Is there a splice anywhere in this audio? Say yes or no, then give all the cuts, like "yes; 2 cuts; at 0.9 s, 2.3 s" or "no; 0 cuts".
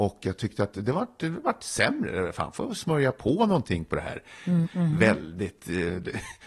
yes; 1 cut; at 4.6 s